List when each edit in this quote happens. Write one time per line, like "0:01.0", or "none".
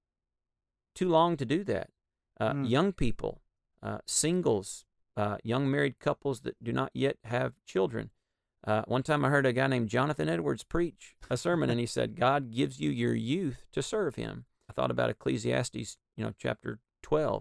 0:14.7